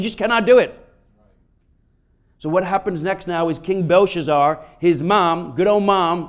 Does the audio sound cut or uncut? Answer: uncut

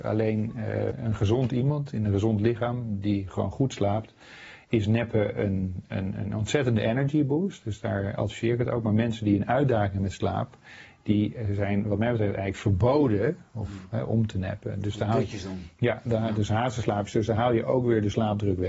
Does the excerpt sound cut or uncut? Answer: cut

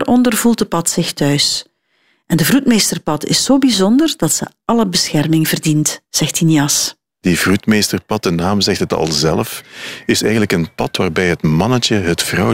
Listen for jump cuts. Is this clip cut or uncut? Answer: uncut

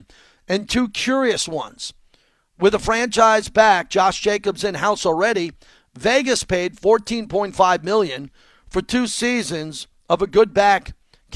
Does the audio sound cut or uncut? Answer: uncut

